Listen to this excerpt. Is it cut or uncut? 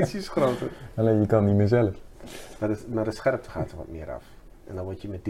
uncut